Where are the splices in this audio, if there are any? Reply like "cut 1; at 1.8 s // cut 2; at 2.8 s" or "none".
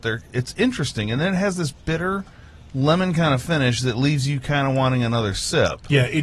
none